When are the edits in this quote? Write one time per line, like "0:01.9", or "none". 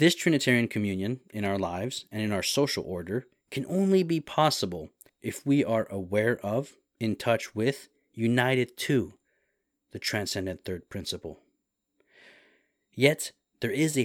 none